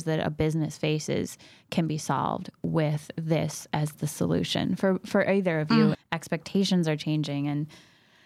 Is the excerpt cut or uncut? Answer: cut